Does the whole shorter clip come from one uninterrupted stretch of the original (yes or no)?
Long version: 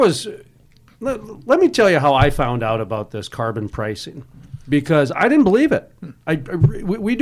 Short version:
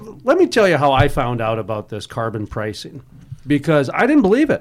yes